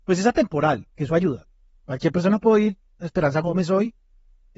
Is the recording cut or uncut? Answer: uncut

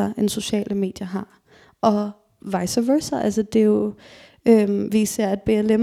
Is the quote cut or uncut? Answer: uncut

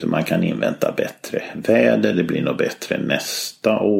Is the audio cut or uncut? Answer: uncut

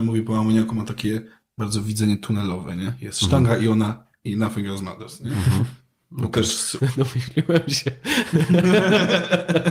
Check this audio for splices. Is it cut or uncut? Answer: cut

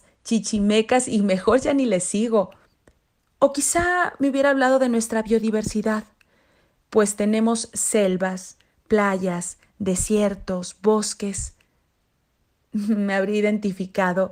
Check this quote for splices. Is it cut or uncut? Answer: uncut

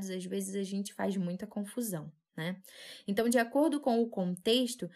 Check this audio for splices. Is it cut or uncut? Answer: uncut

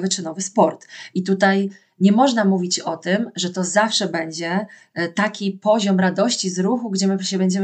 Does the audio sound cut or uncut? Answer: uncut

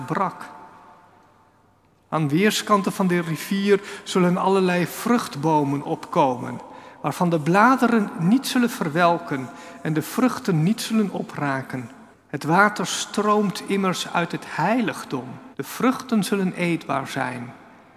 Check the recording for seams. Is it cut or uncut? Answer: cut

